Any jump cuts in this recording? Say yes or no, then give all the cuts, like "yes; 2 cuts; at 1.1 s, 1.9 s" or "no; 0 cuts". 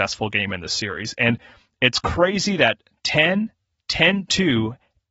no; 0 cuts